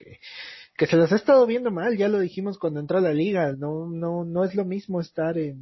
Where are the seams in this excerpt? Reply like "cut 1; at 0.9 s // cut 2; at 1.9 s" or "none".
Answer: none